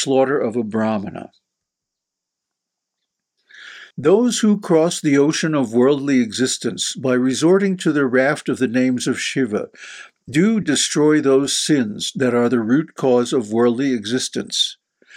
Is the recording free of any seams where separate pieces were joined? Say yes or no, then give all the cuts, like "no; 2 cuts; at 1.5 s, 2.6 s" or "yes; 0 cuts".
no; 2 cuts; at 3.9 s, 10.6 s